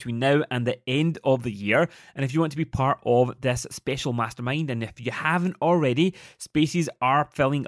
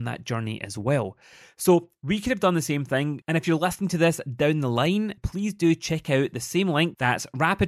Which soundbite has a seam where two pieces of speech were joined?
second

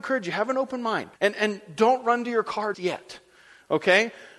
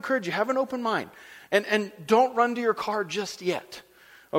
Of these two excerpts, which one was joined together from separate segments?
first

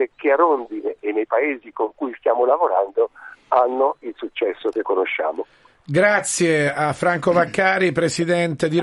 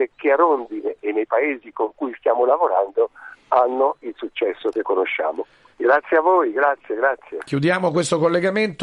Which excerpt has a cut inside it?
second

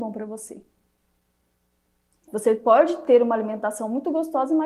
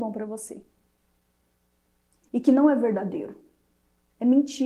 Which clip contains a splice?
first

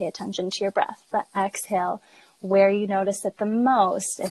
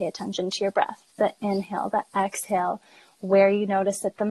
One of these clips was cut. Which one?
first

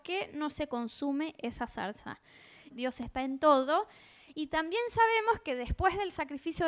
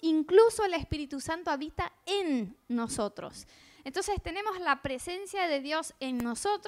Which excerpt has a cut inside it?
first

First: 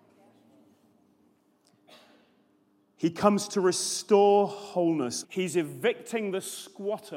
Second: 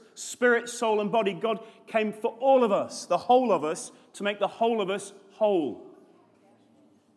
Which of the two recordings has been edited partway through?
first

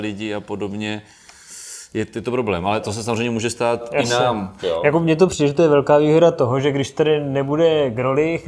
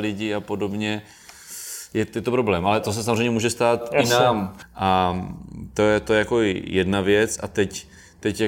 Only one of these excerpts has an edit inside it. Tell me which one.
second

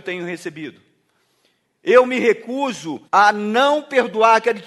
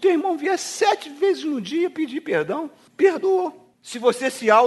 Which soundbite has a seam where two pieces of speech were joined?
first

